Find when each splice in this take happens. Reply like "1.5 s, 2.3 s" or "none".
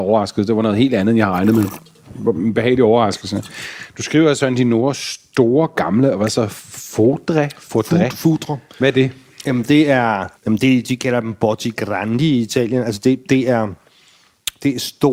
10.4 s